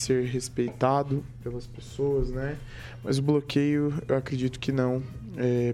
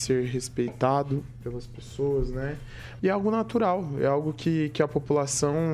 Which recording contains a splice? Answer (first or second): second